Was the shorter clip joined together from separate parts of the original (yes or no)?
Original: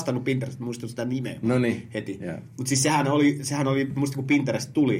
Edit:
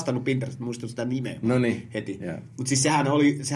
no